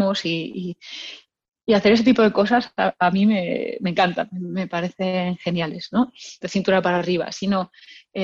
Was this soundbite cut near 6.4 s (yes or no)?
yes